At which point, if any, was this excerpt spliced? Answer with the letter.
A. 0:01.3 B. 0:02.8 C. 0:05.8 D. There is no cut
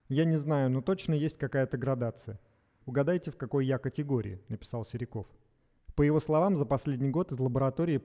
B